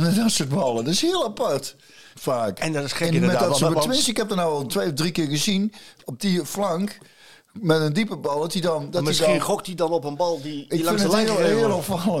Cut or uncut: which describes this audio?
cut